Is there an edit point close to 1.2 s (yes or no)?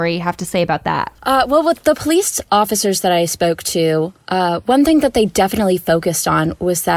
yes